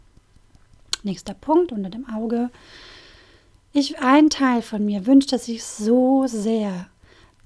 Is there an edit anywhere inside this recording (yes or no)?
no